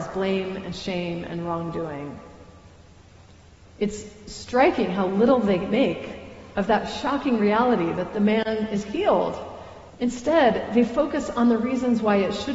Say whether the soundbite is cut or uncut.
cut